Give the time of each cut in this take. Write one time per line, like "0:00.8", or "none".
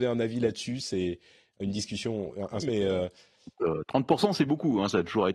0:02.6